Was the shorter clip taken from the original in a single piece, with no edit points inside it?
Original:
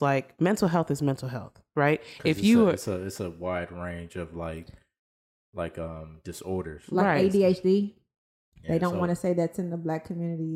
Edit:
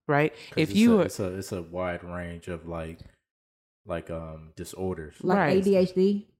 yes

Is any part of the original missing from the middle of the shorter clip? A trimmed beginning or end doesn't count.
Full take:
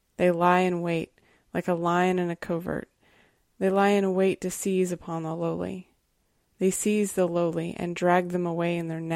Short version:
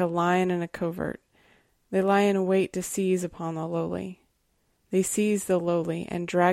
no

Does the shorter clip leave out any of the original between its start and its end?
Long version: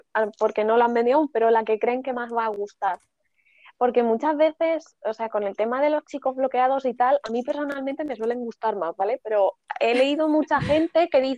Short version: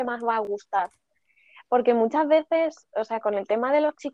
no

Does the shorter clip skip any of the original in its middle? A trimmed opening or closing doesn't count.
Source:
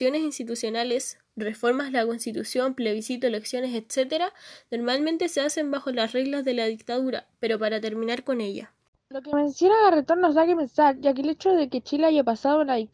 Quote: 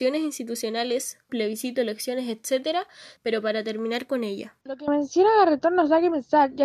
yes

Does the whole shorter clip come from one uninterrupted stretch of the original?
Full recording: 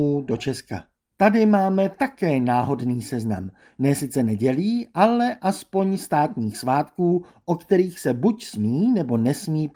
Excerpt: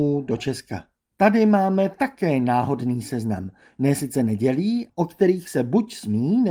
no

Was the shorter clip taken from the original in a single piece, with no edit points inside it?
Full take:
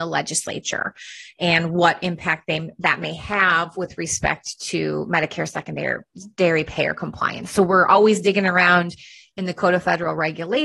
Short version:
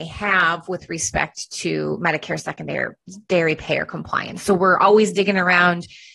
yes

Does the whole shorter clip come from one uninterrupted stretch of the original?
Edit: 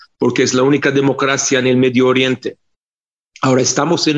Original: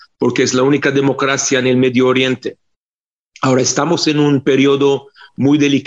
yes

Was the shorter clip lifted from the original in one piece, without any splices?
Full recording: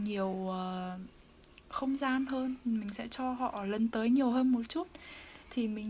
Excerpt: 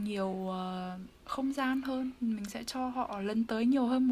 no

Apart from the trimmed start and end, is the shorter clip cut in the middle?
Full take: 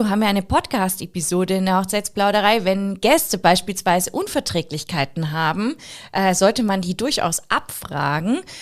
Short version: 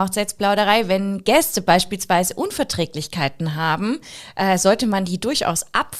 no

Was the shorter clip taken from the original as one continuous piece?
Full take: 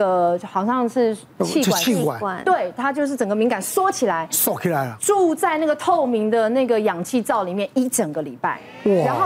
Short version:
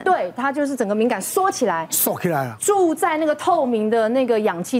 yes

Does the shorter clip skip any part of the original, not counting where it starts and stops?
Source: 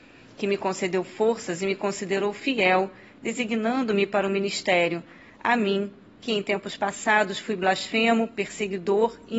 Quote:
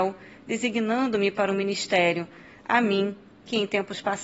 no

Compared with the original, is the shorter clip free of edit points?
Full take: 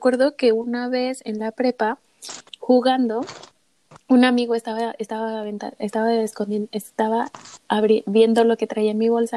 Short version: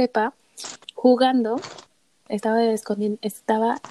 no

